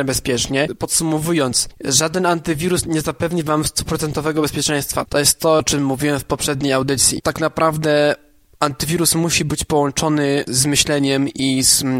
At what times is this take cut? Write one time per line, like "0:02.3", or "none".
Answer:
none